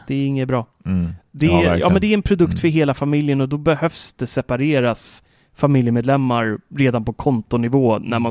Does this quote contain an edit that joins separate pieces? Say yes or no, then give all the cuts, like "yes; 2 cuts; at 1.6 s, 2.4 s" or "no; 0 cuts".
no; 0 cuts